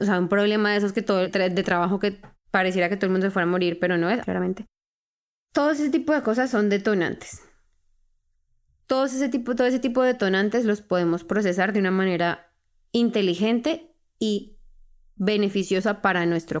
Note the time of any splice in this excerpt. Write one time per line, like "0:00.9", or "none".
0:01.2
0:04.2

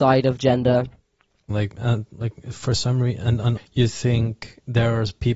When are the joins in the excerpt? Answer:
0:01.5
0:03.6

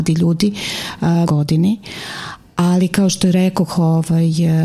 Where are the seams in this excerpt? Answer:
0:01.3

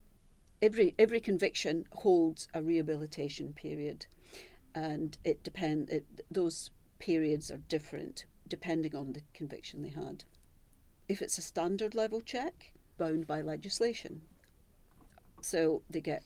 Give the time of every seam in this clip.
0:09.3
0:13.0

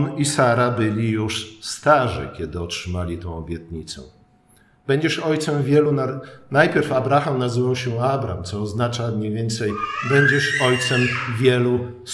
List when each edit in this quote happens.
none

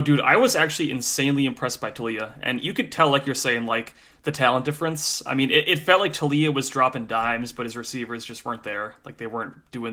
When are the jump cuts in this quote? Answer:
none

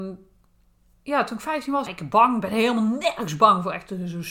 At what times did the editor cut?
0:01.9

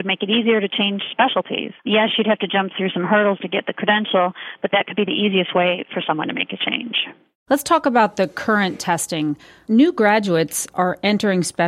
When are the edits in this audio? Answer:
0:01.8

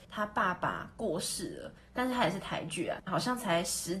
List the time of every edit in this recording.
0:01.8
0:03.1

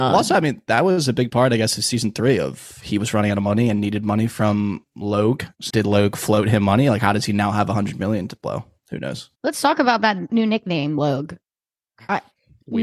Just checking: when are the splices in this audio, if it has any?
0:05.7
0:09.3

